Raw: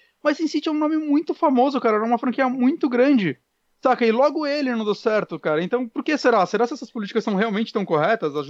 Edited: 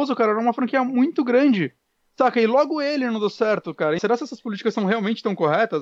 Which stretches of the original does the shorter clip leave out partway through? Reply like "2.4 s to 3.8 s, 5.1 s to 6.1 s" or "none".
5.6 s to 6.5 s